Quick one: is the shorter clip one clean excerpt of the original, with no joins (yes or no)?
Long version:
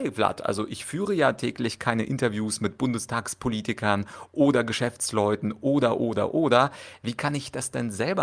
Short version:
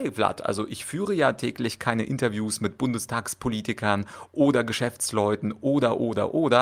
yes